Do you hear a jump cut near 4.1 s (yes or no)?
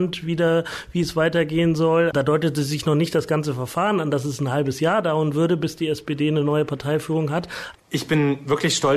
no